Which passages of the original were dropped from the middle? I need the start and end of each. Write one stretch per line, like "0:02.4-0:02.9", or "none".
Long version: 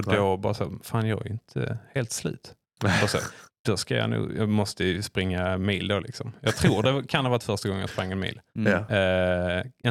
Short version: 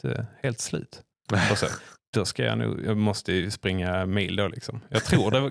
none